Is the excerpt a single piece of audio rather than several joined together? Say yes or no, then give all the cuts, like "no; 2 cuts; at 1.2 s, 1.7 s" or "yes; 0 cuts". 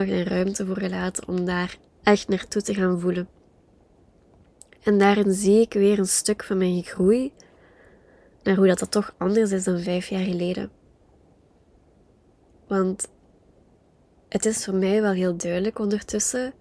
no; 1 cut; at 1.8 s